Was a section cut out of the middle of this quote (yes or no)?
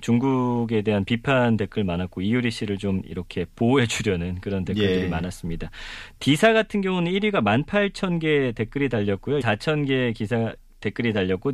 yes